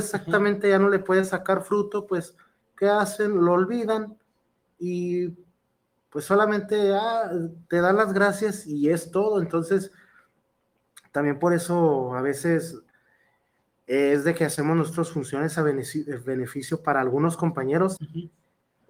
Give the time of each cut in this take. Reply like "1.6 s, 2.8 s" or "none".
18.0 s